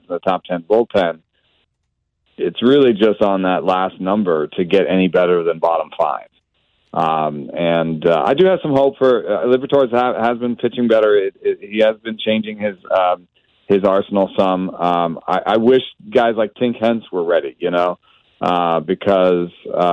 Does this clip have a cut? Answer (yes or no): no